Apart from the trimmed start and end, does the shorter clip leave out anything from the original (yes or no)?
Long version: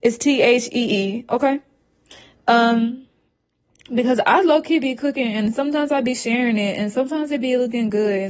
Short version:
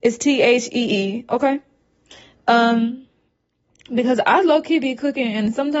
no